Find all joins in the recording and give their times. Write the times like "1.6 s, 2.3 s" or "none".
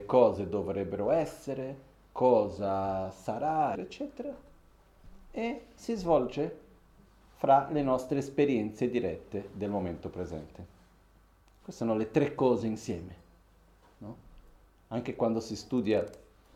3.7 s

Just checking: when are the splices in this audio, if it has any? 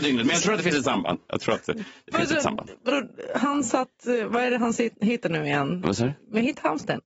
none

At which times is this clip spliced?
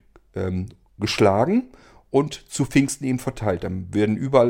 none

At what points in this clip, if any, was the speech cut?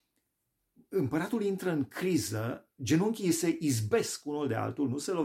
2.7 s

